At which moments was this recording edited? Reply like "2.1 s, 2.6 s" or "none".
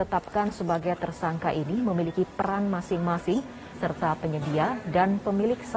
3.7 s